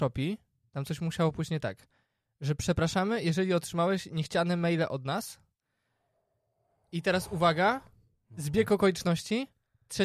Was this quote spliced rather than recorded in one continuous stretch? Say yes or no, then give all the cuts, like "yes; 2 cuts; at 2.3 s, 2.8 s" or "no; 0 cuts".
no; 0 cuts